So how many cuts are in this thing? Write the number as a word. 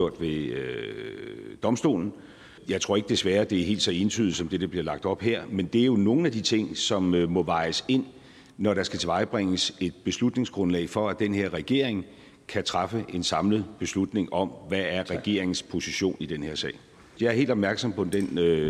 two